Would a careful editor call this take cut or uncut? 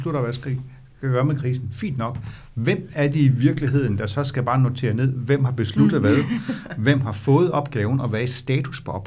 uncut